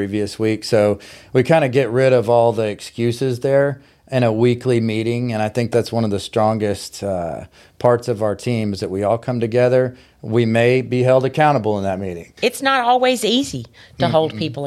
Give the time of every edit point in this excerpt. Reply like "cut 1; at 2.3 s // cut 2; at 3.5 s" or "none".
cut 1; at 12.4 s